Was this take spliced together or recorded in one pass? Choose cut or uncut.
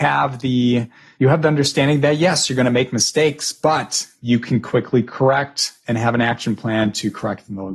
uncut